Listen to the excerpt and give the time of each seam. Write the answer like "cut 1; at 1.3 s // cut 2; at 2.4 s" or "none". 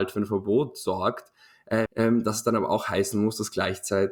cut 1; at 1.9 s